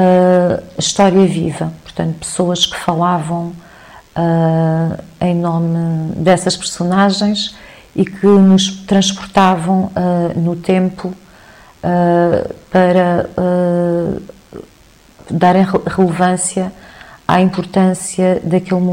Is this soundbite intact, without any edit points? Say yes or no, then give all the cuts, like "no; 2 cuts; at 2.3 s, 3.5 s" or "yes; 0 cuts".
yes; 0 cuts